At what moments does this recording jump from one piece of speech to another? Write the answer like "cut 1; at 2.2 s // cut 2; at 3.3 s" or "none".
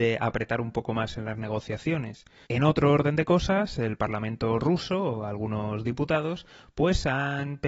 cut 1; at 2.4 s